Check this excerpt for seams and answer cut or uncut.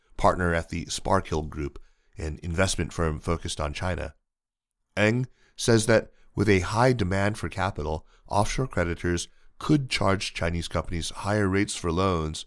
uncut